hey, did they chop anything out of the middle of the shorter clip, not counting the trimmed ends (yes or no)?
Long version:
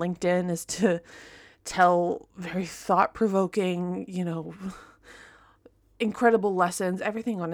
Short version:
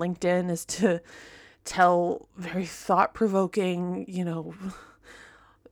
no